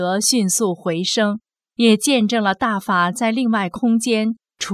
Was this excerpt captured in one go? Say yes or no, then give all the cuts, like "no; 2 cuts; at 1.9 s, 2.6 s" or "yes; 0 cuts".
no; 1 cut; at 1.5 s